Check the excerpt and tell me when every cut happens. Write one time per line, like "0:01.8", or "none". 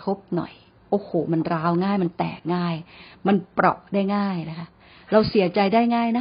none